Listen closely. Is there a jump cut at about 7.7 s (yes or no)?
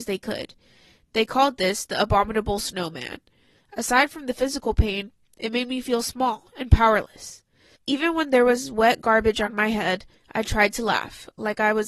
yes